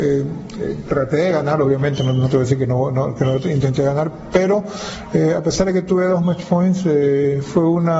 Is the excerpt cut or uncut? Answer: uncut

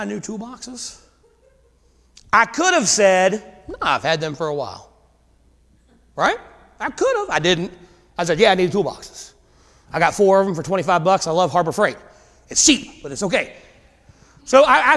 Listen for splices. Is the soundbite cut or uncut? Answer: uncut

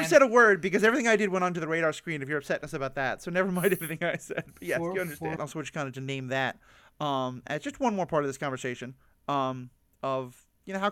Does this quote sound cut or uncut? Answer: cut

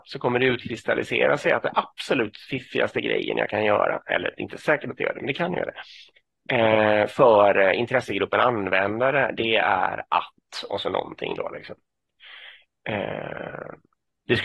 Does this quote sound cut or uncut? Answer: uncut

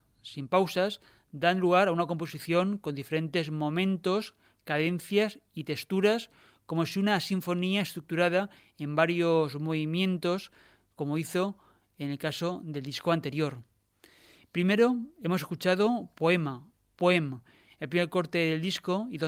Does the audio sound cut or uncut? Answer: uncut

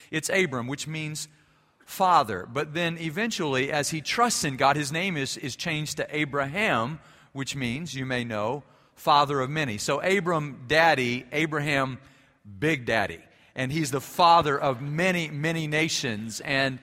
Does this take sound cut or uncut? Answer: uncut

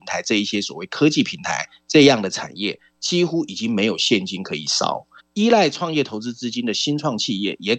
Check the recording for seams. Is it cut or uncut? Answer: cut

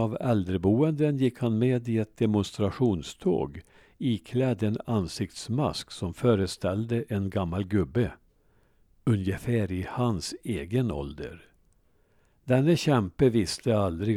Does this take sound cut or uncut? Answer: uncut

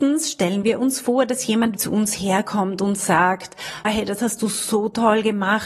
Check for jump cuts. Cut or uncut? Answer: cut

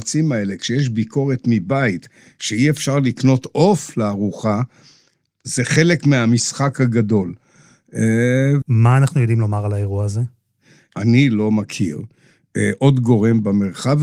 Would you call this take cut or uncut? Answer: cut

